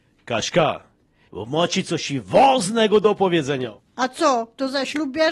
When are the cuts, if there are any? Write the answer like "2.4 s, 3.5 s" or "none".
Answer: 1.3 s